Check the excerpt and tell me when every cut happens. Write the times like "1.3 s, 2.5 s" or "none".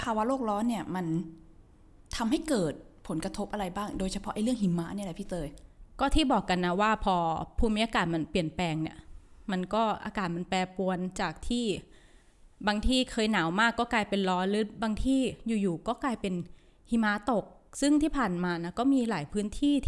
none